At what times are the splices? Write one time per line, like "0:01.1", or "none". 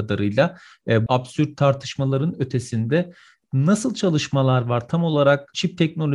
0:01.1